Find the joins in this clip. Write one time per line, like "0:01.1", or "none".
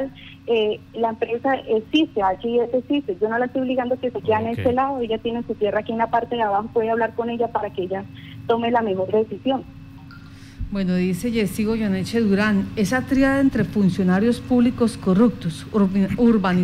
none